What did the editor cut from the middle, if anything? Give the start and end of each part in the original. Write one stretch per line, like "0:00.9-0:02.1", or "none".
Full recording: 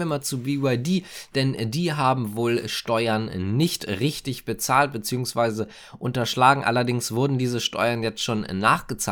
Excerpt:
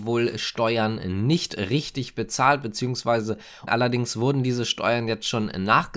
0:06.0-0:06.6